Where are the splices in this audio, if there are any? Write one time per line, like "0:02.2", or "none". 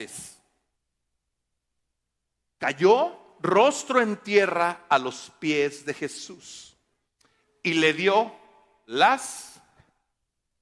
none